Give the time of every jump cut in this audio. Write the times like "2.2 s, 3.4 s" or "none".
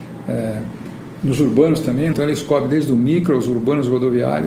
2.1 s